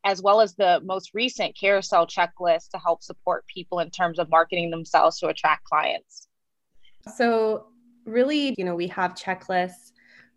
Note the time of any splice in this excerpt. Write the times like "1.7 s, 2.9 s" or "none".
7.1 s, 8.5 s